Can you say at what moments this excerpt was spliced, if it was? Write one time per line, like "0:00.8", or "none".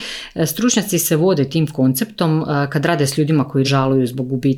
0:03.6